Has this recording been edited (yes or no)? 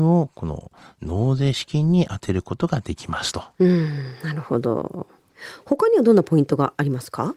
no